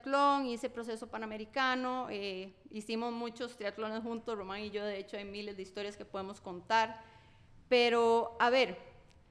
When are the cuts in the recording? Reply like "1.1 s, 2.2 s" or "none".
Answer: none